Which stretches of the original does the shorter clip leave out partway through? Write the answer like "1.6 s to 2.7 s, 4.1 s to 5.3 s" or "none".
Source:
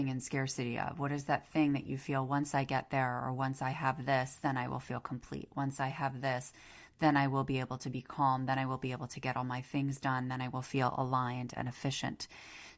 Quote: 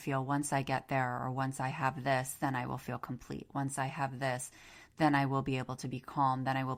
none